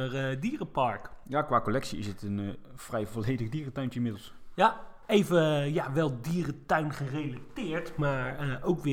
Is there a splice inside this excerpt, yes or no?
no